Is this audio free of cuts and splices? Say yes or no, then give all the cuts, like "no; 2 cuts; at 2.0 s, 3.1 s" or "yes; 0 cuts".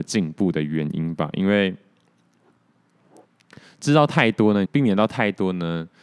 no; 1 cut; at 4.7 s